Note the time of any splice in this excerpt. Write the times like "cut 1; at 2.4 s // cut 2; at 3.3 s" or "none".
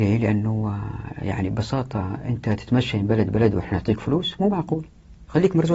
none

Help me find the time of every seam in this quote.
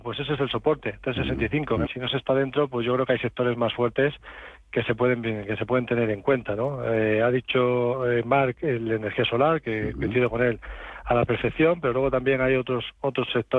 cut 1; at 1.9 s

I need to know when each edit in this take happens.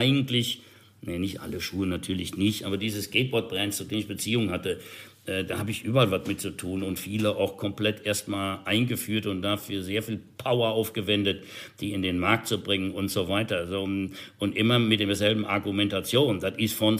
none

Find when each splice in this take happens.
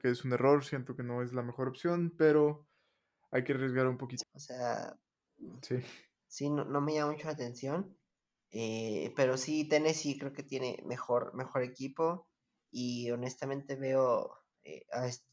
cut 1; at 4.2 s

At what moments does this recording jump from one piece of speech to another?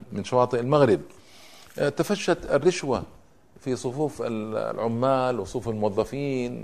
none

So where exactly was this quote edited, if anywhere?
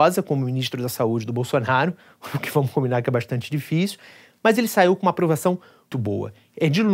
cut 1; at 5.9 s

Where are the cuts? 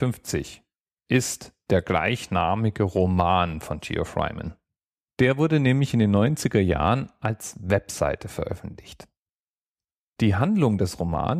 none

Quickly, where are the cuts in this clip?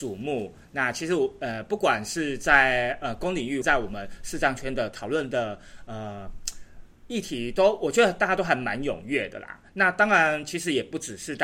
cut 1; at 3.6 s

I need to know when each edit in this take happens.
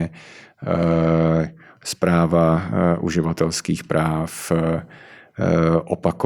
none

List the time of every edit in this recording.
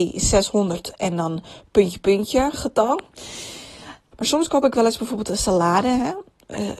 cut 1; at 2.0 s // cut 2; at 4.1 s

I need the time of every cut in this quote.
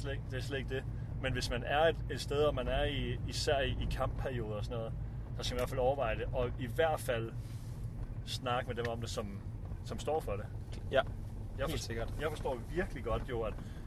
none

